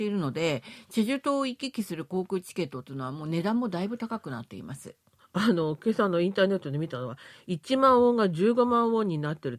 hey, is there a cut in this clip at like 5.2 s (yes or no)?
no